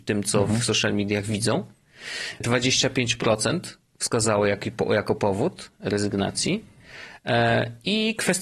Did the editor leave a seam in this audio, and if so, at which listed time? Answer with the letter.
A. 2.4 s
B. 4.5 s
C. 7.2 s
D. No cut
A